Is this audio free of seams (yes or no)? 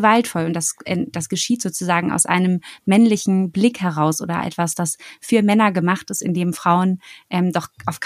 yes